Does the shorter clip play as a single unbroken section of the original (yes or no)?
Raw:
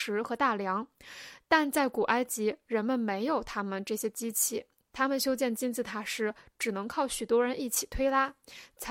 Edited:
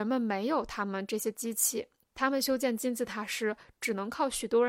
yes